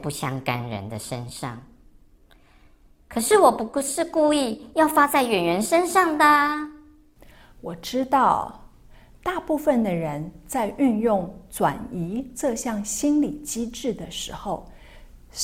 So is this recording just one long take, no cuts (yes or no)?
yes